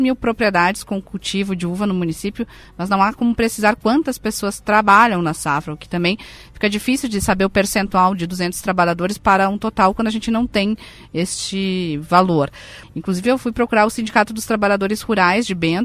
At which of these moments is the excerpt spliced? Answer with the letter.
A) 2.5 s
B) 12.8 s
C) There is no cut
B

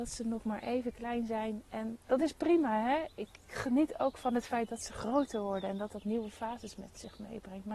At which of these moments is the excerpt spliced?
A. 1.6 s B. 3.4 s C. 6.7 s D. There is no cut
B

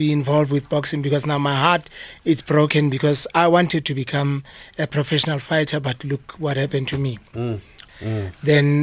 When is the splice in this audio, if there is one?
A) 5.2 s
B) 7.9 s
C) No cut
B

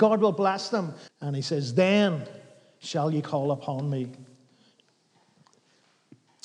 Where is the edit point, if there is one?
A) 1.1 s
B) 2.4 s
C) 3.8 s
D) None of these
A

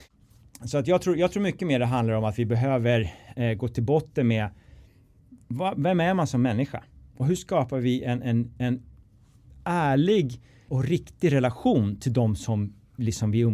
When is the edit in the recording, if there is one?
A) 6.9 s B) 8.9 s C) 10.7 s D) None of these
C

